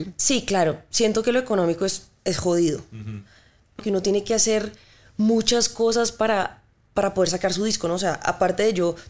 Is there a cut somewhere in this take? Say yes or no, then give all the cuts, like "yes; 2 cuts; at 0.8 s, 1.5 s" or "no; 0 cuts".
yes; 1 cut; at 3.8 s